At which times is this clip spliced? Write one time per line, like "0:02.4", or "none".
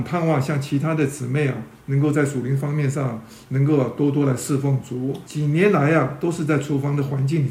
0:05.2